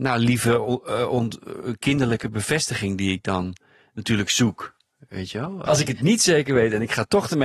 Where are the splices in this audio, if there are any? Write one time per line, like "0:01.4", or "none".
0:05.7

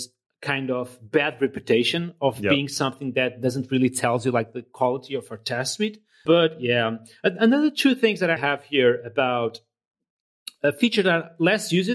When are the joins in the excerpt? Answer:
0:06.3
0:08.4

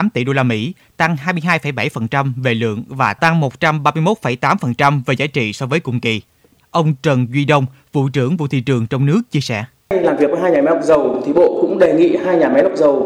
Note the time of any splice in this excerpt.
0:06.6

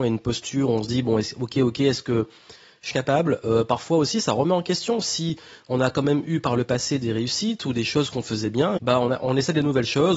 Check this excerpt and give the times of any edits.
0:02.9
0:08.8

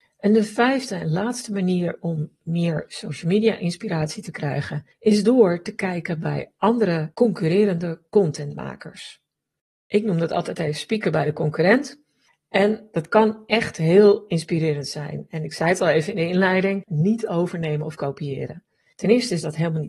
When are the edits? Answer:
0:16.9

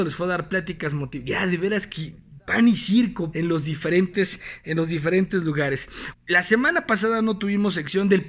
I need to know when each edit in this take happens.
0:03.3
0:06.1

